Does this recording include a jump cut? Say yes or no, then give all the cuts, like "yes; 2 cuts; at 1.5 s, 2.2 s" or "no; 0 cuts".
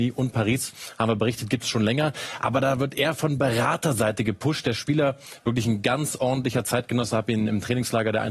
no; 0 cuts